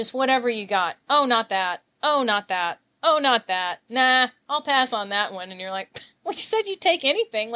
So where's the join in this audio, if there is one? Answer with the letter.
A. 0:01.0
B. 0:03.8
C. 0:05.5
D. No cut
A